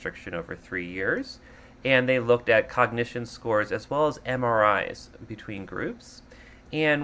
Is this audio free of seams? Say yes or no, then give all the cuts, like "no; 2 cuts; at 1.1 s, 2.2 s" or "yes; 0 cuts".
yes; 0 cuts